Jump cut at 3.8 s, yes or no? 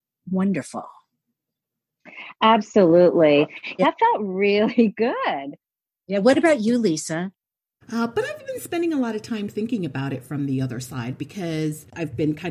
yes